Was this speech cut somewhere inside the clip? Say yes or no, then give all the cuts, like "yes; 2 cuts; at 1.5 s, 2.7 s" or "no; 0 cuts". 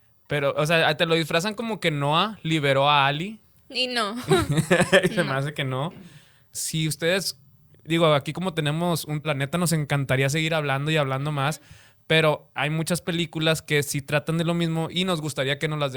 yes; 2 cuts; at 6.5 s, 9.2 s